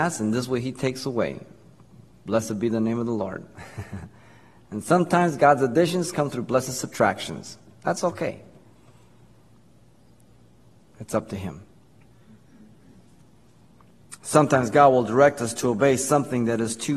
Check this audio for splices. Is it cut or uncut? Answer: uncut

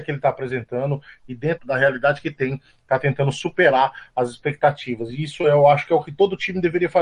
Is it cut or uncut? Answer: cut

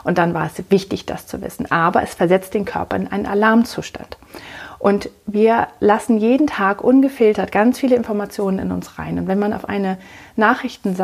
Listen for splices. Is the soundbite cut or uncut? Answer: uncut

